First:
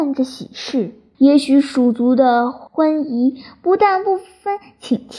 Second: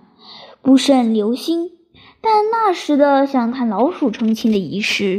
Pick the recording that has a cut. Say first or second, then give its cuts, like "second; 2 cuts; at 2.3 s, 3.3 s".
first; 2 cuts; at 1.1 s, 2.7 s